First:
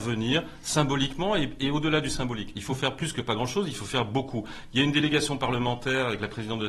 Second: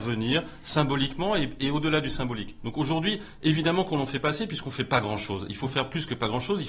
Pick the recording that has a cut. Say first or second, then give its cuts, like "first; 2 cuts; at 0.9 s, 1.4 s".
first; 1 cut; at 2.5 s